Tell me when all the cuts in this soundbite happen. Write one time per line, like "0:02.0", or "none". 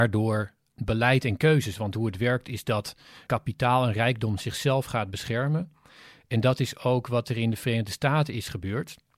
none